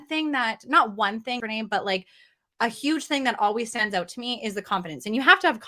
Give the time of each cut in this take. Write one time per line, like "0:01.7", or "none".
0:01.4